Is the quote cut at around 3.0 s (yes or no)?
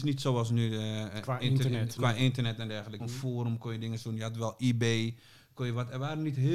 yes